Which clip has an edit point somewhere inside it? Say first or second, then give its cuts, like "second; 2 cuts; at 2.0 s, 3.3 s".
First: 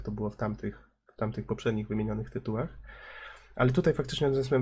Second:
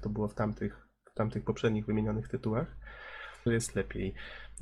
second; 1 cut; at 3.5 s